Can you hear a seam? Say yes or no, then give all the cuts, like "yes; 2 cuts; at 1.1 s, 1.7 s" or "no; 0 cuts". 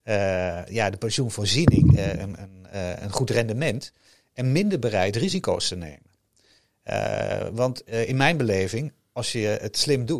no; 0 cuts